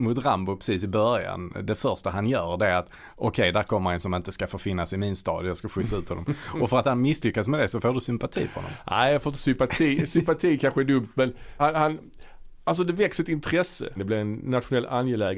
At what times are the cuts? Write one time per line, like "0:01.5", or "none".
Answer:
0:11.6
0:14.0